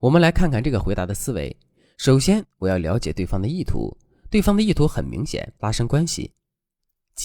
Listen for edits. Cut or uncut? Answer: cut